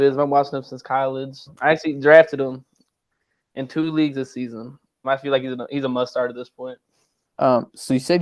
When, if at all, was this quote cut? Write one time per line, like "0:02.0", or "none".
0:01.5
0:05.0